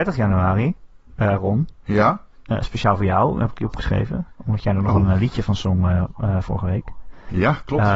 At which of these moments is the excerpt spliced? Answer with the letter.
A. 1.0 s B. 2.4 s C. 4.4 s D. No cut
D